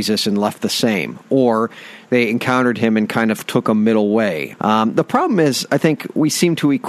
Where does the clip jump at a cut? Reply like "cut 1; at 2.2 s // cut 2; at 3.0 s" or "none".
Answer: cut 1; at 4.5 s